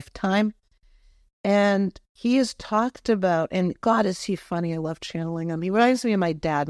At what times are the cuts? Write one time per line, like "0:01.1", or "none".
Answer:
none